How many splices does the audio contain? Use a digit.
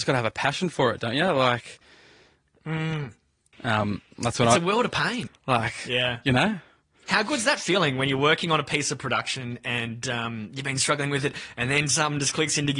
2